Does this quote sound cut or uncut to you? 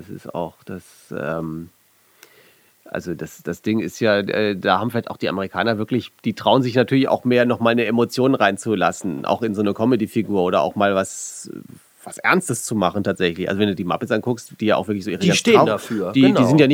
uncut